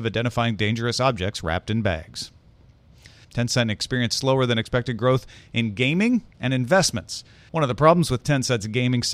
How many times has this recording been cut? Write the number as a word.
two